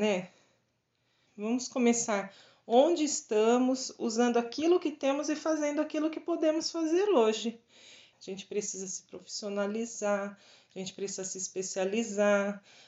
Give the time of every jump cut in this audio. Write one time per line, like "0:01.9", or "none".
0:01.3
0:08.1

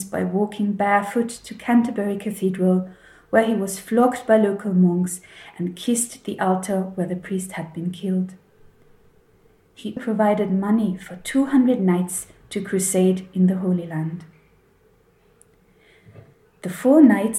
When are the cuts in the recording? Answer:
0:10.0

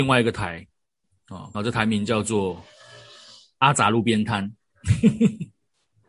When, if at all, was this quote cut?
0:01.5

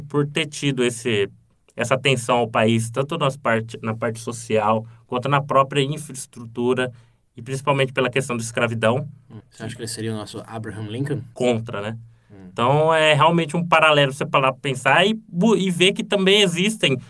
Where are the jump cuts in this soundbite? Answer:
0:09.4
0:11.3

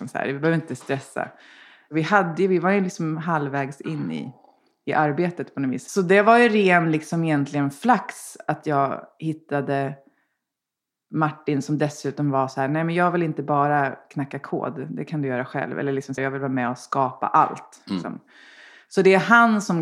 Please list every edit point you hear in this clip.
0:16.2

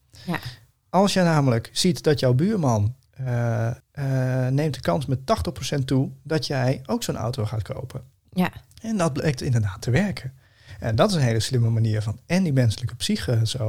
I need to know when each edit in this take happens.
0:03.8

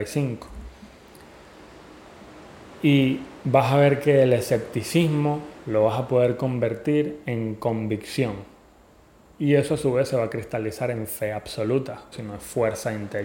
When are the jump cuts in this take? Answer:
0:12.1

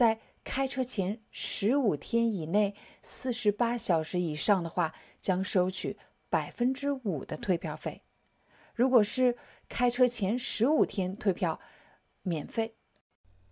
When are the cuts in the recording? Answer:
0:12.1

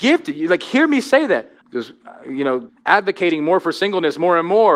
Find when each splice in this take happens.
0:01.6
0:02.7

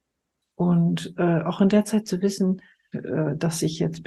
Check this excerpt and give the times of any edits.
0:02.9

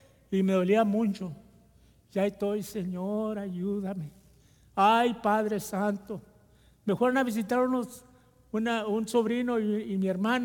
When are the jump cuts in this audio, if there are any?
none

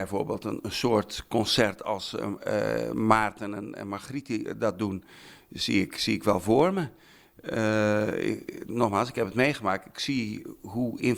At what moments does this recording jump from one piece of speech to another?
none

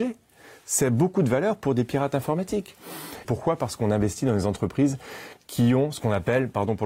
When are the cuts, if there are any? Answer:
0:03.2

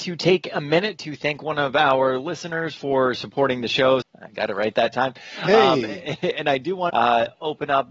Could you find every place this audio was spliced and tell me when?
0:04.0
0:06.9

